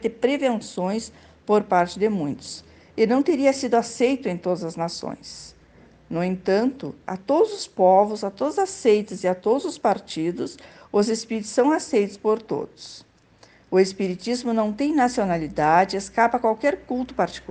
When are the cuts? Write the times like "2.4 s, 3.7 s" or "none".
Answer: 7.0 s